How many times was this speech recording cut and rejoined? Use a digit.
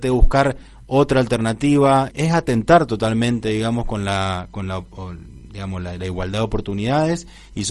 1